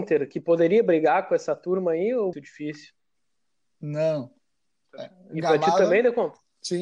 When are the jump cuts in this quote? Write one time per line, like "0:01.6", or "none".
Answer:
0:02.3
0:04.8